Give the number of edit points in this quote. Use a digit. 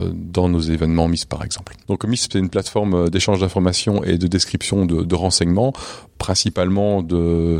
1